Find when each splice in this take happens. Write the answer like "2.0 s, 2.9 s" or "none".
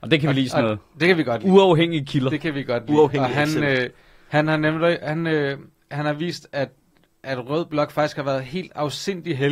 none